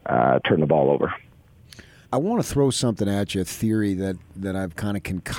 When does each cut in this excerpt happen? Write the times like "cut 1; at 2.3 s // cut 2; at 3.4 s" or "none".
cut 1; at 2.0 s